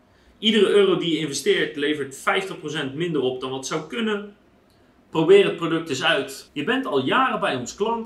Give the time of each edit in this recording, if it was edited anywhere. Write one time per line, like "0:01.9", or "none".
0:06.5